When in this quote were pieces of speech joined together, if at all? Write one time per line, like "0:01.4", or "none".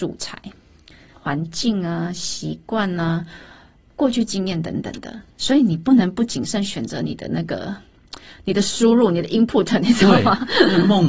0:01.1